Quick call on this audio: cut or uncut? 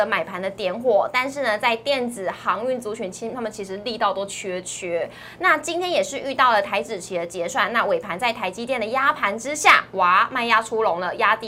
uncut